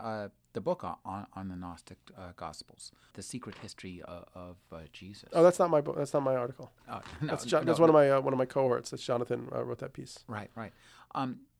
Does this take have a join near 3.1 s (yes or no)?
yes